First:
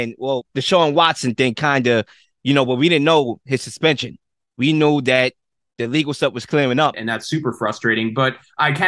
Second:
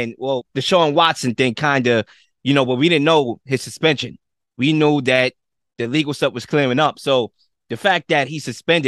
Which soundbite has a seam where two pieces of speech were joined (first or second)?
first